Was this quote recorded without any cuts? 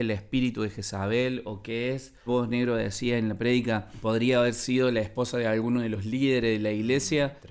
no; 1 cut; at 2.3 s

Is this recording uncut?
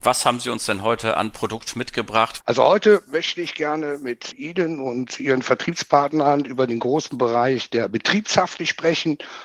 no; 2 cuts; at 2.4 s, 4.3 s

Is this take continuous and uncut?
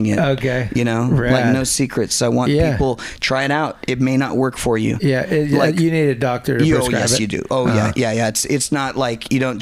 yes; 0 cuts

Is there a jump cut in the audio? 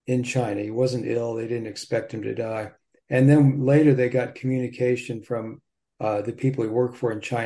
no; 0 cuts

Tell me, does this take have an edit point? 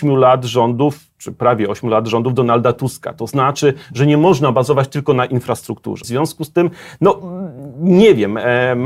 yes; 1 cut; at 6.0 s

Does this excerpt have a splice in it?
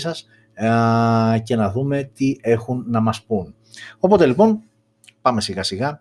no; 0 cuts

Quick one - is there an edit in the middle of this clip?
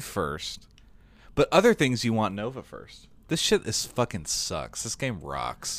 no; 0 cuts

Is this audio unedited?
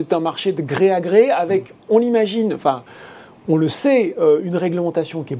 yes; 0 cuts

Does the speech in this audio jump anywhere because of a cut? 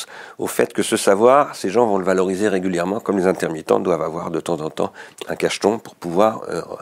no; 0 cuts

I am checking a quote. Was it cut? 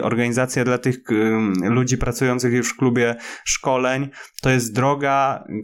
no; 0 cuts

